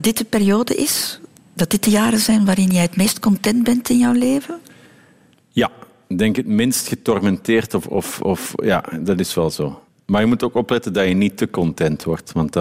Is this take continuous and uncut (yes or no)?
yes